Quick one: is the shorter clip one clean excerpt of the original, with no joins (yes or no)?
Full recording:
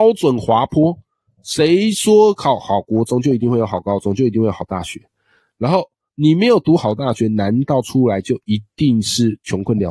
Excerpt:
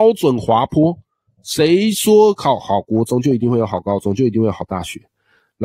yes